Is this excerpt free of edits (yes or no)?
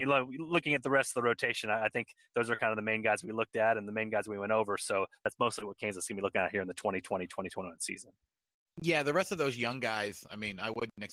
yes